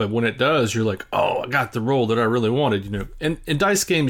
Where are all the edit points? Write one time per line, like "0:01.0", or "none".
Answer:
none

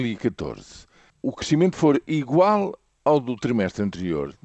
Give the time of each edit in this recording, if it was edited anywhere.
none

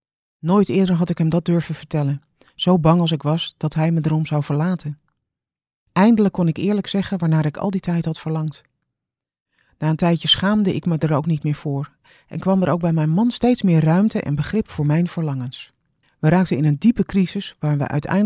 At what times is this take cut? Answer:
0:05.9
0:16.0

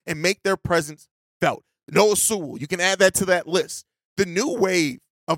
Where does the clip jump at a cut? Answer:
none

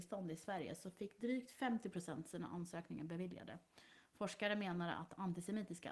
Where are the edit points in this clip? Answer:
none

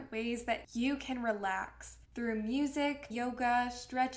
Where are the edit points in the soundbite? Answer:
0:02.0
0:03.1

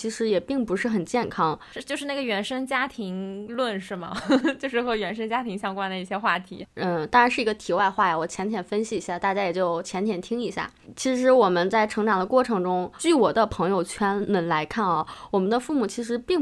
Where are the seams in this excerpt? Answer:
0:06.6

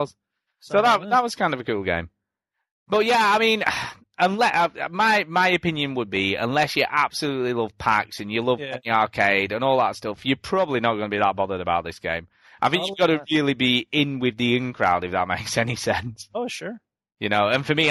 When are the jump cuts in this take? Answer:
none

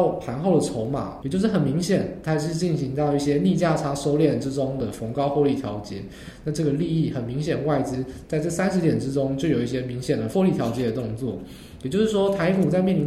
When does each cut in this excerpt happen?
0:01.2

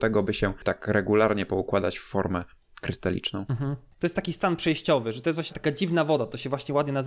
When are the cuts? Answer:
0:05.5

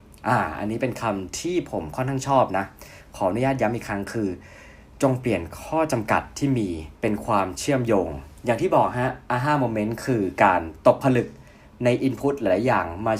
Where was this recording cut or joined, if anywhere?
0:07.0

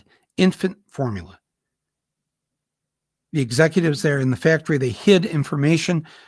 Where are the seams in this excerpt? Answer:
none

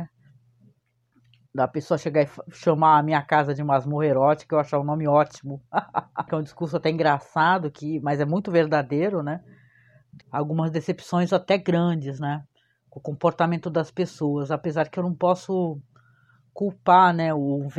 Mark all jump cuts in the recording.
0:06.3
0:10.2

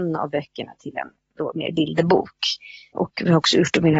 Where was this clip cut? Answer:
0:02.9

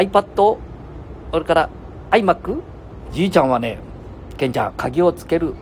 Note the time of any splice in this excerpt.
0:03.1
0:04.7

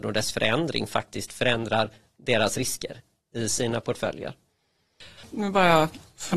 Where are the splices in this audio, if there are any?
0:05.2

